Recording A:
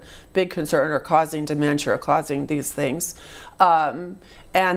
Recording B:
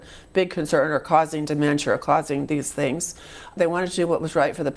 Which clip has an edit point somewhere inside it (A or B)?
B